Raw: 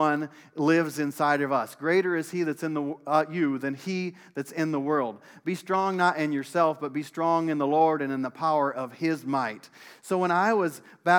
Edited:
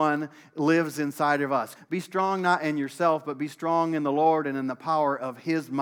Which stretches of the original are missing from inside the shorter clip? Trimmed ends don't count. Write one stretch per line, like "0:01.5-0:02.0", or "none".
0:01.8-0:05.3